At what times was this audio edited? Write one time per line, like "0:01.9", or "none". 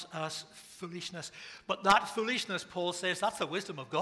none